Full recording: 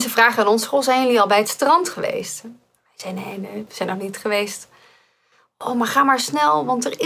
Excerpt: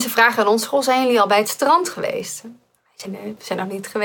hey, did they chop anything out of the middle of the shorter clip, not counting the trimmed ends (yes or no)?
yes